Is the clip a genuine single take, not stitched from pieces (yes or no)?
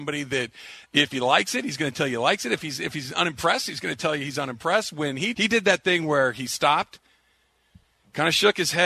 no